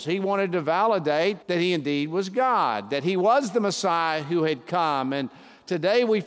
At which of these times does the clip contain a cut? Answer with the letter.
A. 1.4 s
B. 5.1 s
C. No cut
A